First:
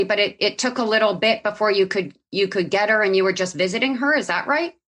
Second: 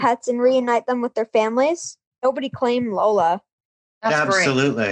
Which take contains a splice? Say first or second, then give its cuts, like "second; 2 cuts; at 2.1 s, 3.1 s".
second; 2 cuts; at 2.2 s, 3.8 s